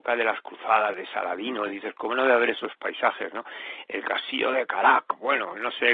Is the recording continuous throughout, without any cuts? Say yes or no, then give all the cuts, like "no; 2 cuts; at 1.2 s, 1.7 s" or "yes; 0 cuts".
yes; 0 cuts